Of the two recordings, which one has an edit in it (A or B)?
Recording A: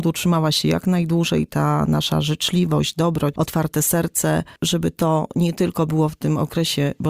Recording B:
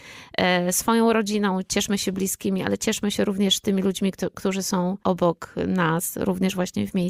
A